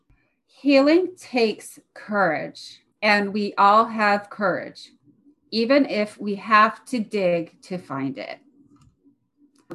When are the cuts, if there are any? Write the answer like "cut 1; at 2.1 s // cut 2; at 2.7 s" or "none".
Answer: none